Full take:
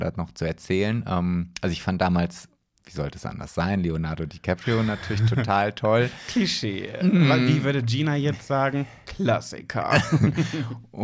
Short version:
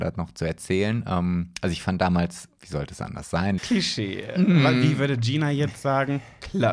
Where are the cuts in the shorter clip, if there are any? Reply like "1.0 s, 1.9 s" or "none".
2.6 s, 3.6 s